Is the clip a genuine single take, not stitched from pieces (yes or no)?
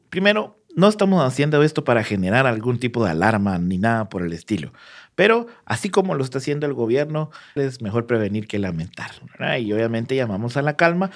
no